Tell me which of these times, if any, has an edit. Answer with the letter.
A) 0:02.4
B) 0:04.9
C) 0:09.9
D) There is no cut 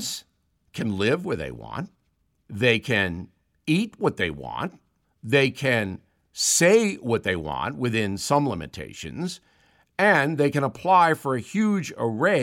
D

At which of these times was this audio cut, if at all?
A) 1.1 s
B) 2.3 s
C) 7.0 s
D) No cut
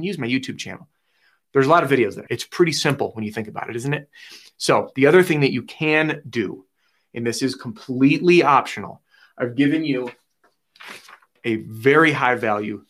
B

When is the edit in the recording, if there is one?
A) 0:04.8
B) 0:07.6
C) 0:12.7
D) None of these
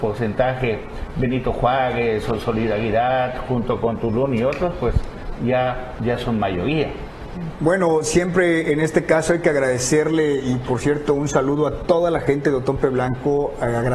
B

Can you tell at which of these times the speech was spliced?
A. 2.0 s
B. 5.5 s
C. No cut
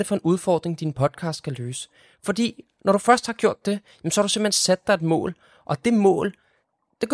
C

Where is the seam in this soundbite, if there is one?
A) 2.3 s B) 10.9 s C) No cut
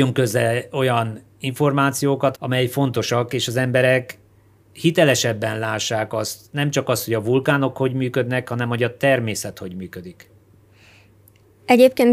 A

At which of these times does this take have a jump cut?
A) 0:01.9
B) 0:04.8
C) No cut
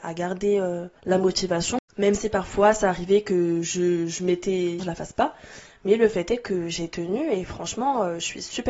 B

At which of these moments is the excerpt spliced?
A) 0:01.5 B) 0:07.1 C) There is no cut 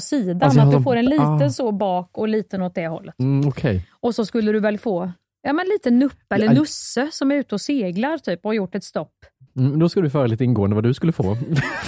C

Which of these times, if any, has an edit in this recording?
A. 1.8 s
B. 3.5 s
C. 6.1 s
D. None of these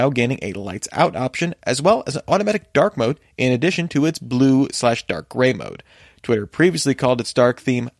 D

